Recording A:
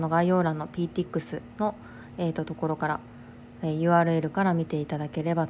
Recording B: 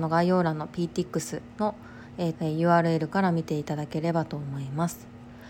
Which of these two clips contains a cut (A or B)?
B